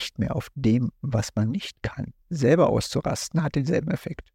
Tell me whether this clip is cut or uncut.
cut